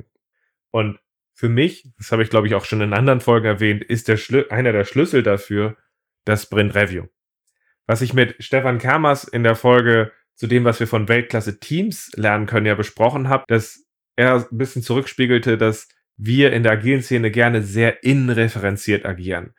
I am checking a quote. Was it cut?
yes; 1 cut; at 13.4 s

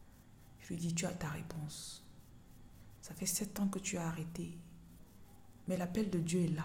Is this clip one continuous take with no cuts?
no; 1 cut; at 3.0 s

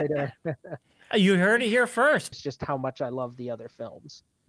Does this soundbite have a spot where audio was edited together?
yes; 1 cut; at 2.3 s

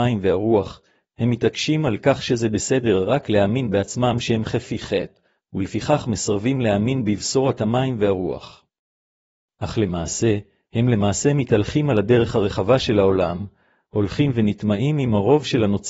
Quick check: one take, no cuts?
yes; 0 cuts

